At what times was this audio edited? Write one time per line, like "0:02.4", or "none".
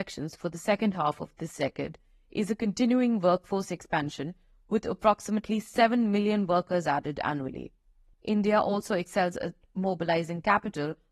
0:08.1